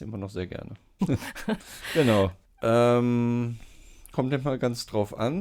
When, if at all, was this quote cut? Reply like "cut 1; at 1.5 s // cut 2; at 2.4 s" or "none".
cut 1; at 1.0 s // cut 2; at 2.4 s